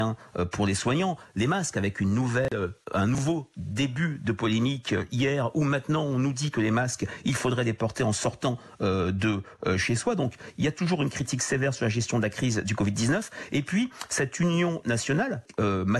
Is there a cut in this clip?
no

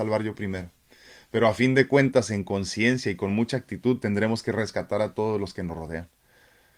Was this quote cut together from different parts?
no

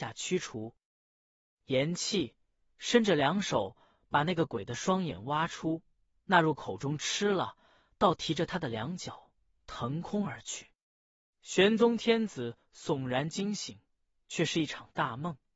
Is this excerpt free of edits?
yes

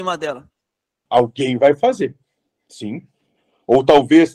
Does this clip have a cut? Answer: yes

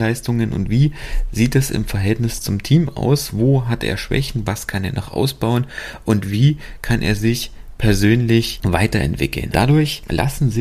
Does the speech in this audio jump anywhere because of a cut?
yes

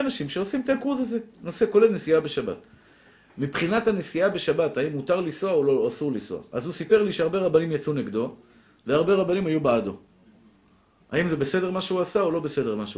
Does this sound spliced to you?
no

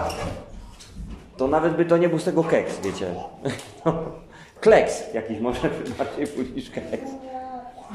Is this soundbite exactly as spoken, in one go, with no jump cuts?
yes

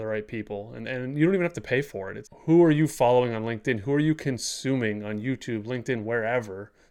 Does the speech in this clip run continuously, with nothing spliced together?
no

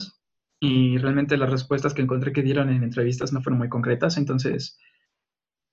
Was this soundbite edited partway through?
no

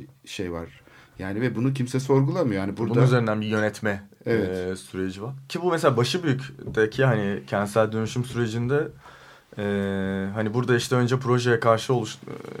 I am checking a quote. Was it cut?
no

